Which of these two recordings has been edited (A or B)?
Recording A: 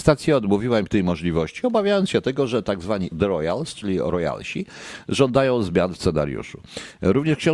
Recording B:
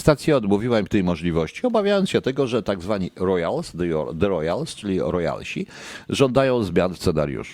A